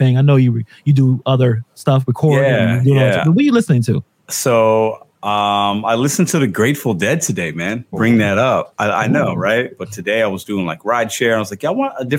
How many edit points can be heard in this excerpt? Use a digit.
2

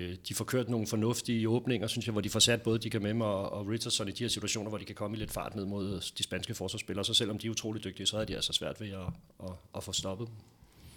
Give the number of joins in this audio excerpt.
0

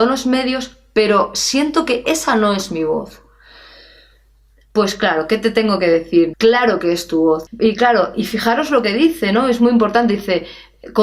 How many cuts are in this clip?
2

